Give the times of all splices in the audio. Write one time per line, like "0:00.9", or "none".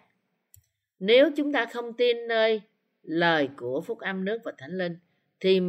none